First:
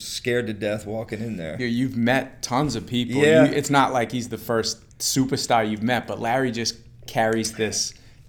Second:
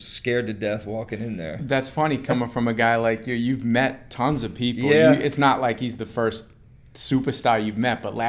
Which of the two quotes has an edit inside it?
first; 2 cuts; at 1.6 s, 4.9 s

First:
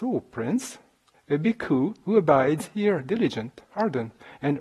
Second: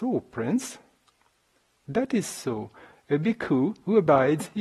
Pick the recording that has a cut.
first; 1 cut; at 1.1 s

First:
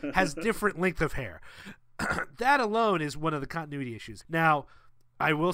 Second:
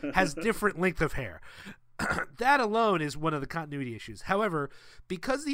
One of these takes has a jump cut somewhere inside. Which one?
first; 1 cut; at 4.2 s

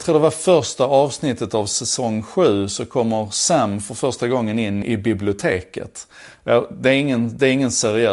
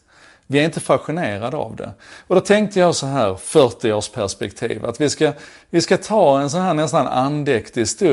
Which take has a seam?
first; 1 cut; at 4.8 s

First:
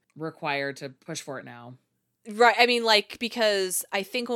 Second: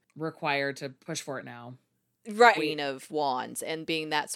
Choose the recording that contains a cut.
second; 1 cut; at 2.5 s

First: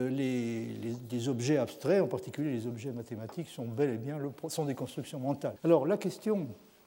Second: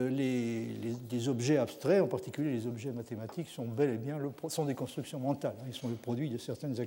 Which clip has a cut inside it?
first; 1 cut; at 5.6 s

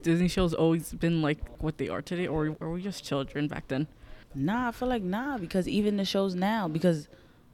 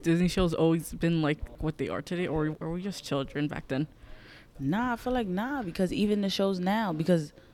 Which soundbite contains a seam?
first; 1 cut; at 4.2 s

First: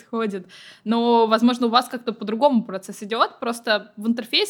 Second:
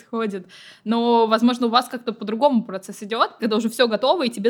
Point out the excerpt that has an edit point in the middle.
second; 1 cut; at 3.4 s

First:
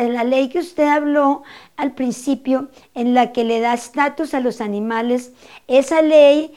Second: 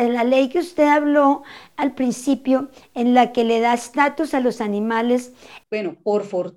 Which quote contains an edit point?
second; 1 cut; at 5.6 s

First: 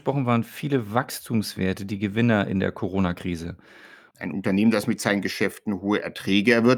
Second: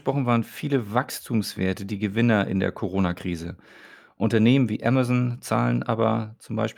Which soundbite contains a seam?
first; 1 cut; at 4.1 s

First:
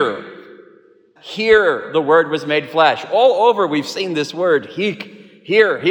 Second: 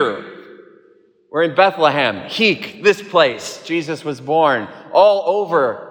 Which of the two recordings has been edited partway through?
first; 1 cut; at 1.2 s

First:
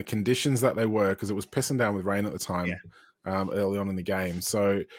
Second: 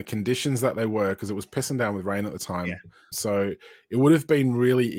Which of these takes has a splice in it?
second; 1 cut; at 3.1 s

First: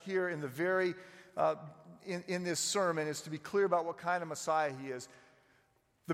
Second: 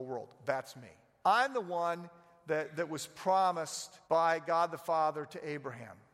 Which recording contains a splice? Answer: second; 2 cuts; at 1.2 s, 4.0 s

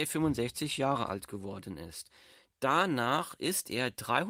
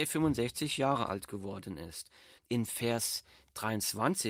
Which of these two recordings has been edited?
second; 1 cut; at 2.4 s

